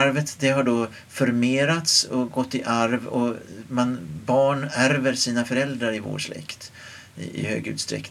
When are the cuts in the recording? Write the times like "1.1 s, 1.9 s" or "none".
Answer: none